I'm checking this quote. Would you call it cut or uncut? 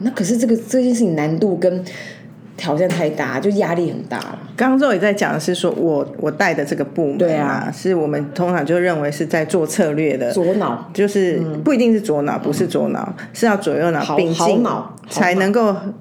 uncut